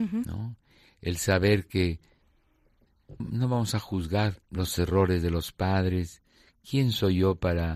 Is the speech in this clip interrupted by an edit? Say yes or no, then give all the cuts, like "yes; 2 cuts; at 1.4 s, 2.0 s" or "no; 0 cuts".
yes; 2 cuts; at 3.2 s, 4.4 s